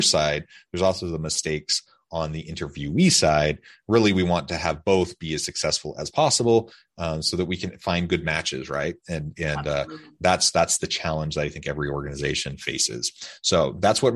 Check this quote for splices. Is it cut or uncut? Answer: uncut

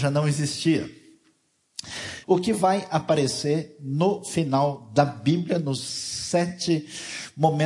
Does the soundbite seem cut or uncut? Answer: cut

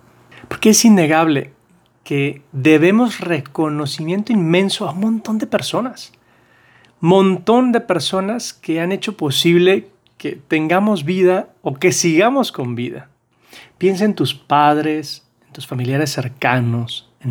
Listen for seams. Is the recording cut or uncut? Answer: uncut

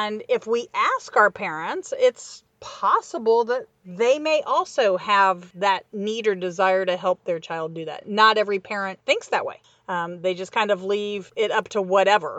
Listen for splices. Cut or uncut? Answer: uncut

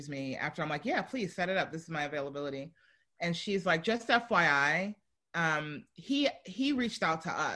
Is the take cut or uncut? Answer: uncut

